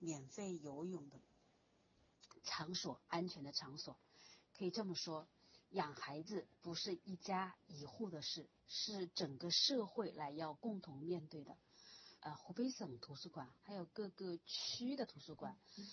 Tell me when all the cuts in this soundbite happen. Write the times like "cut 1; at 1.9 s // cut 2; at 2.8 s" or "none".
cut 1; at 12.2 s // cut 2; at 13.6 s